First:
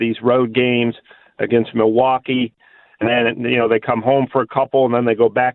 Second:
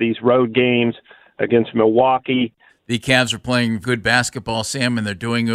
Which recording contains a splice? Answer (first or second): second